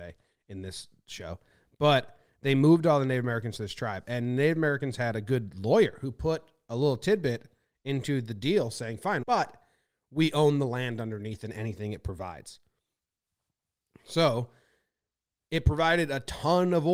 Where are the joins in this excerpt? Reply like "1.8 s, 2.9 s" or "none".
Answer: 9.2 s